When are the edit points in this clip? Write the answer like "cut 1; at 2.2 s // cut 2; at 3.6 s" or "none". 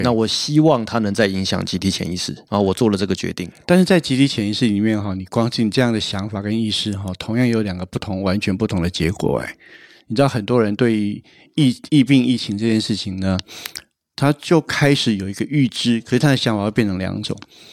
cut 1; at 2.5 s